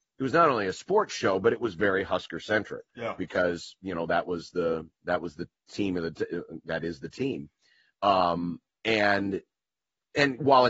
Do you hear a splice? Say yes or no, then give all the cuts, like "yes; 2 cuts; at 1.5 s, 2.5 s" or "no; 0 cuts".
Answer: yes; 1 cut; at 2.9 s